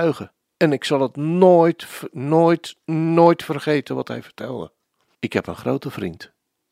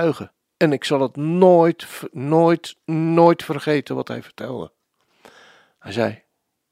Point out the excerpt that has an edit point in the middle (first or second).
first